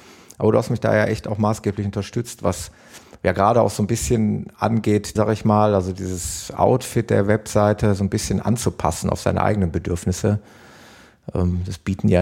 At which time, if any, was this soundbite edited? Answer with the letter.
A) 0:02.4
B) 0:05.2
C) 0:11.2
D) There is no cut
B